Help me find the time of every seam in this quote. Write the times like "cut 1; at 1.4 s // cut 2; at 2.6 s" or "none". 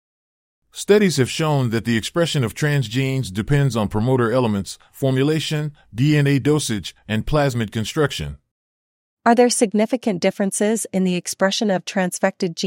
cut 1; at 7.0 s // cut 2; at 9.2 s